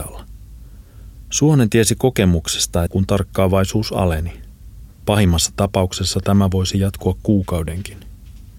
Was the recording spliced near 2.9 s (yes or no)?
yes